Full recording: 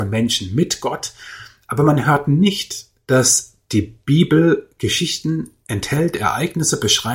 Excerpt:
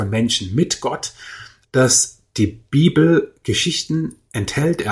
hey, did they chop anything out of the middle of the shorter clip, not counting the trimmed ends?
yes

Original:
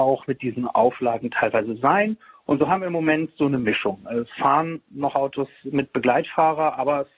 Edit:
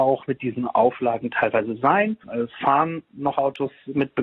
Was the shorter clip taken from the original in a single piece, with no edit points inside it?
no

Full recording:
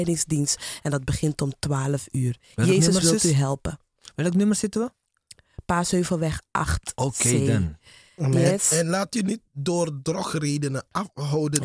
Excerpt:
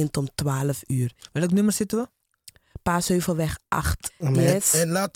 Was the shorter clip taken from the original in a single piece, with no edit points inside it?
no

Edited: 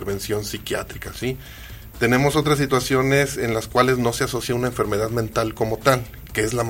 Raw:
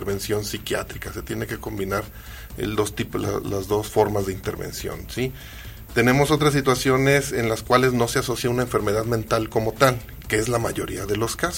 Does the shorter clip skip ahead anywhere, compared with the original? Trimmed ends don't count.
yes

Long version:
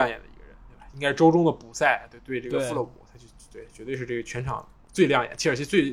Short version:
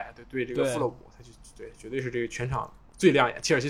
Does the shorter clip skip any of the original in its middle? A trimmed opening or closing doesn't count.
no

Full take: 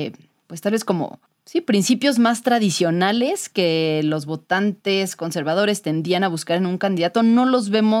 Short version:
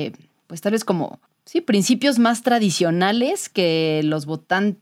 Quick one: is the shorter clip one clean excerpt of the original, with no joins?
yes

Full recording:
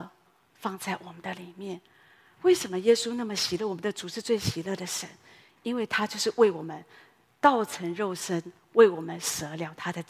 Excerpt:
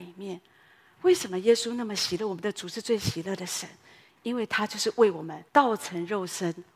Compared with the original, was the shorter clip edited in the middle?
yes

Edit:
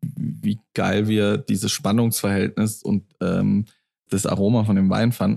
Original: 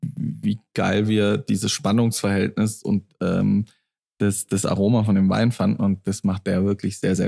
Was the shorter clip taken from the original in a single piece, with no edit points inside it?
no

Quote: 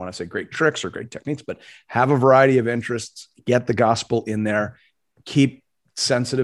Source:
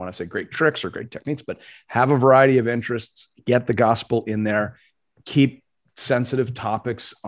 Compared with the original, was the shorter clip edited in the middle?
no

